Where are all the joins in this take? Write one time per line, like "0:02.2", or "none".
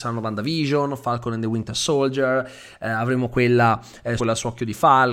0:04.2